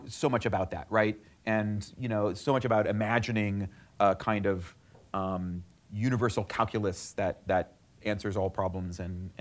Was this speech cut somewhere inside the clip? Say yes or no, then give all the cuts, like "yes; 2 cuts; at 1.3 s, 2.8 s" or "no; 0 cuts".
no; 0 cuts